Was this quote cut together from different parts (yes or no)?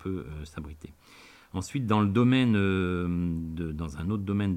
no